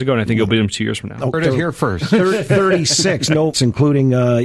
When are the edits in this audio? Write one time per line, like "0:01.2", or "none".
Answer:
0:01.3
0:03.5